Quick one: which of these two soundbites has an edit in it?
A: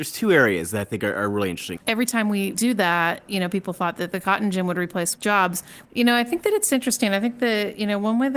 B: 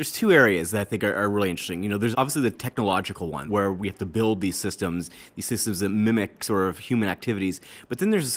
A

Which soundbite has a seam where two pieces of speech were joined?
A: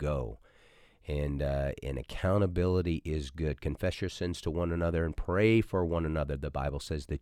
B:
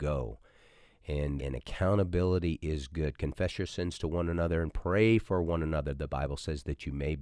B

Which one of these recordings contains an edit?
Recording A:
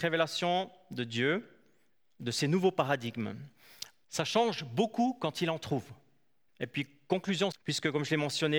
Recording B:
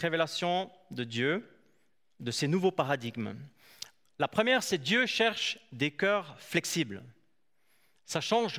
A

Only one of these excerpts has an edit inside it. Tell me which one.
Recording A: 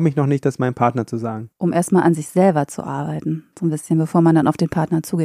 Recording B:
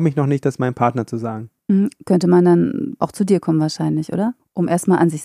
A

